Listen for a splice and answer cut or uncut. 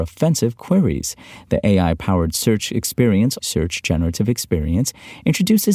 cut